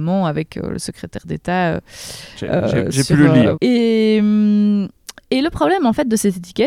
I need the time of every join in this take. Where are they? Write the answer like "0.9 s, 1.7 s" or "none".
3.5 s